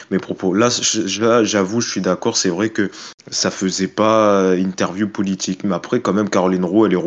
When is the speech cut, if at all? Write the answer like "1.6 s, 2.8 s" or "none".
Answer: none